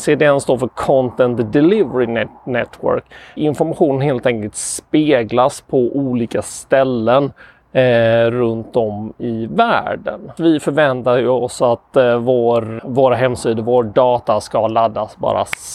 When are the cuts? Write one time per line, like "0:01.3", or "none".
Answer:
0:03.4
0:10.4
0:12.8